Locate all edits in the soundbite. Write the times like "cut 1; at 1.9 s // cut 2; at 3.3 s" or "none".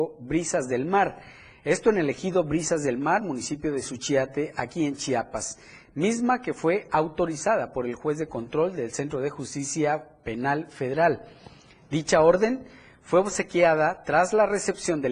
none